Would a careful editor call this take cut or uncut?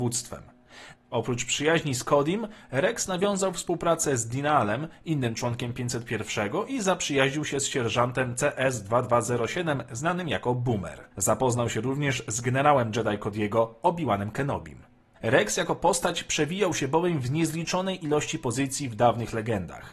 cut